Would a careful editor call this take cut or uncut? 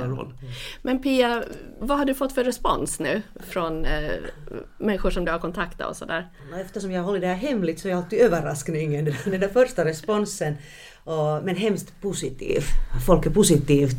cut